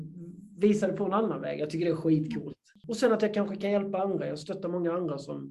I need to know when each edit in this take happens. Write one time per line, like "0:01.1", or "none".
none